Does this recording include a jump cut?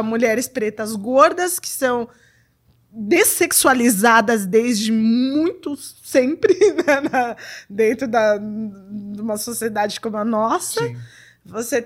no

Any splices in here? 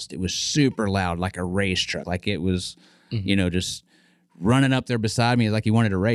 no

